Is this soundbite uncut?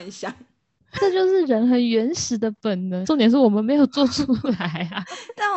no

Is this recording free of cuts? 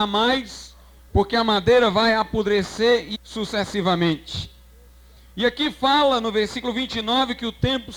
no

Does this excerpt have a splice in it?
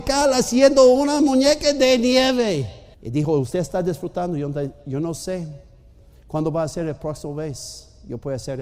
yes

